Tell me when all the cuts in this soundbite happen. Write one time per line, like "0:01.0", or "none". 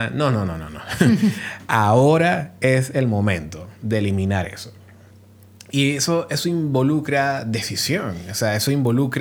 none